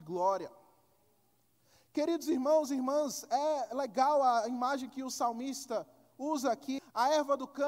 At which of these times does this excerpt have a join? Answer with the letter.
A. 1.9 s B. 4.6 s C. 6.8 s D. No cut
C